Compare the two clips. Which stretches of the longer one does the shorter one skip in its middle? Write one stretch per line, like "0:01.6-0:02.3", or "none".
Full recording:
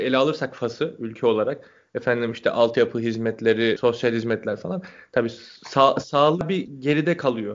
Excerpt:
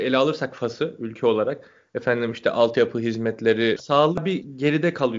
0:03.8-0:06.0